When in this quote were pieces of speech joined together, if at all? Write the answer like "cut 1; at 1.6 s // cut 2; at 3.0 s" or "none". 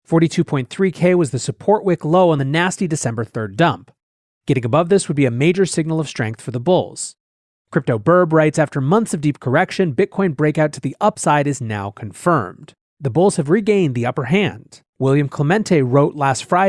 cut 1; at 12.9 s // cut 2; at 14.9 s